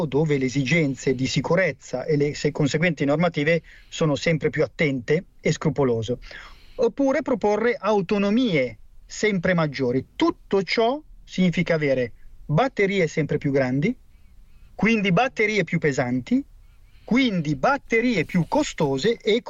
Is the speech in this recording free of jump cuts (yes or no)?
yes